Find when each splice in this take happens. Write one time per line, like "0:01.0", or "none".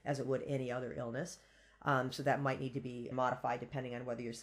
0:03.1